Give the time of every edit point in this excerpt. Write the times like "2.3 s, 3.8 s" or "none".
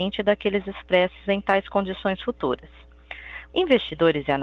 3.5 s